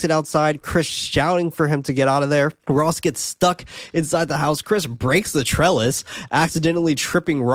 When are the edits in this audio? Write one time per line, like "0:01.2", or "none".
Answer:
0:02.6